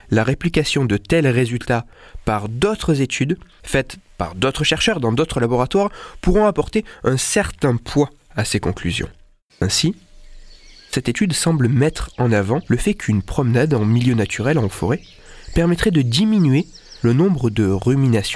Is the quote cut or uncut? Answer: cut